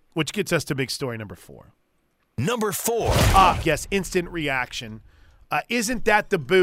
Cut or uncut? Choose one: cut